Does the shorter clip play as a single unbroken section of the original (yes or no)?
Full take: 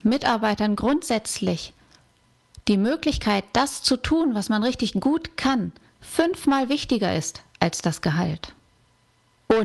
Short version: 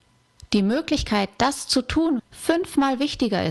no